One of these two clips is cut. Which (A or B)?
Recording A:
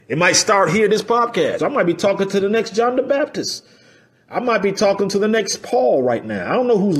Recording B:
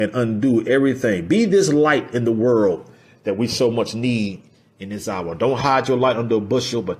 A